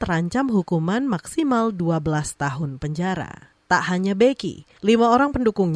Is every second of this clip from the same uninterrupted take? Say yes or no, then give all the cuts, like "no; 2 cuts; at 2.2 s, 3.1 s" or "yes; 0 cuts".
no; 1 cut; at 3.6 s